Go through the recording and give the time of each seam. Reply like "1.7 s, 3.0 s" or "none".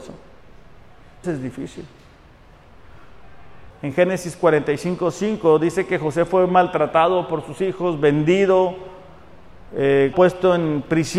1.2 s, 3.7 s, 10.1 s